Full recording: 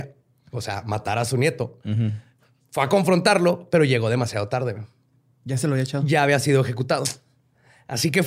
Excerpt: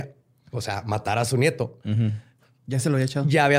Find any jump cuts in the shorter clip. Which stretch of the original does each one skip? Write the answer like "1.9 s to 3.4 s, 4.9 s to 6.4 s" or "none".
2.6 s to 5.3 s